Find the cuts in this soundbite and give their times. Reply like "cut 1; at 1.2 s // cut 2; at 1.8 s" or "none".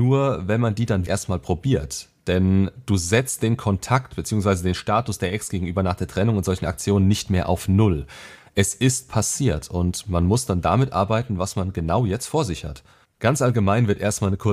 cut 1; at 1.1 s // cut 2; at 13.0 s